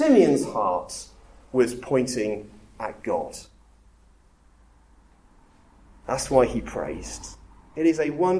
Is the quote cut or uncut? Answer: uncut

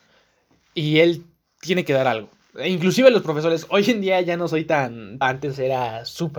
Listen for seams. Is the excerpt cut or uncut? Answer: cut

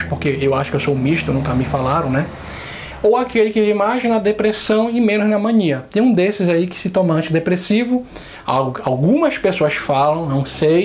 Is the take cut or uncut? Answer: uncut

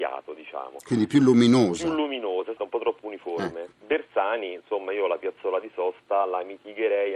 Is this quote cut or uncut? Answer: cut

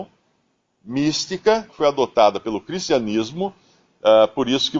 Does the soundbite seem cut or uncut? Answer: cut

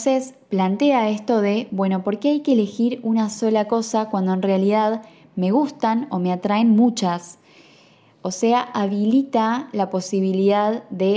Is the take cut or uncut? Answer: uncut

